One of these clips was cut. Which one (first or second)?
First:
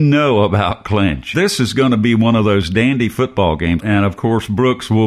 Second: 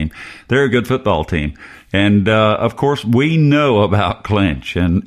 first